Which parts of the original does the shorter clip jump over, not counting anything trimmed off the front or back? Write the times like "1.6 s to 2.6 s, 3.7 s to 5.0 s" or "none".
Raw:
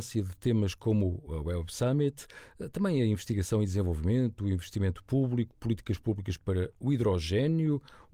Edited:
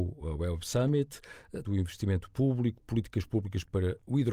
2.7 s to 4.4 s